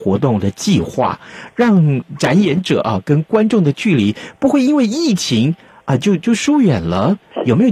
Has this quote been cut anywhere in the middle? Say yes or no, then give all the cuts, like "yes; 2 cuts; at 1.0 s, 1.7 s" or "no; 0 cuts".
no; 0 cuts